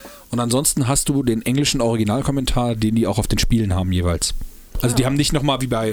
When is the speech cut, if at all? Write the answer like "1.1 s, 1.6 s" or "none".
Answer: none